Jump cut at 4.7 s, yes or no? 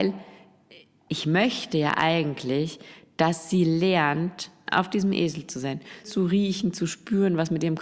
yes